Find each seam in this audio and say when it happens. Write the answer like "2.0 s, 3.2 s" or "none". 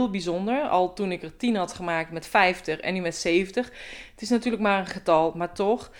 none